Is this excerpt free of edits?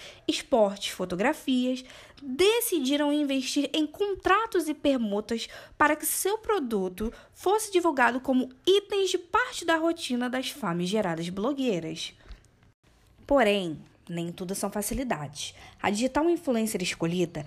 yes; 0 cuts

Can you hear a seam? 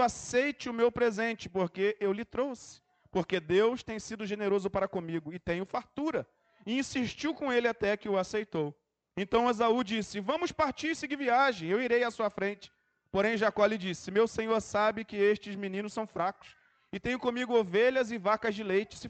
no; 0 cuts

